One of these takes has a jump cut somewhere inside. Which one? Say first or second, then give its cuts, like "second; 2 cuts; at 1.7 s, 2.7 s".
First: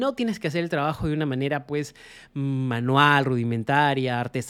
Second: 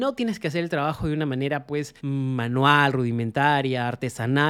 second; 1 cut; at 2.0 s